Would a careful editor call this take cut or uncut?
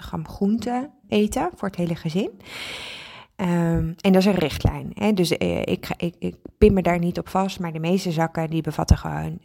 cut